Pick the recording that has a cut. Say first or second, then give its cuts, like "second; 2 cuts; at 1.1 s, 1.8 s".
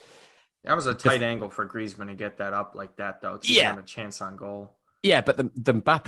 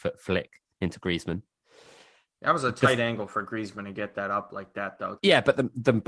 second; 1 cut; at 5.2 s